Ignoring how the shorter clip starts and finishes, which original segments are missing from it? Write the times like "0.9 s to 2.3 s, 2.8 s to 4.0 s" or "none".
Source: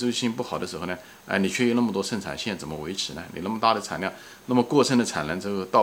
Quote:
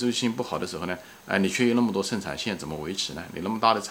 none